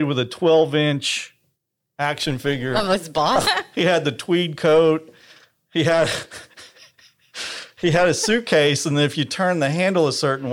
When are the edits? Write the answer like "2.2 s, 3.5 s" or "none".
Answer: 3.4 s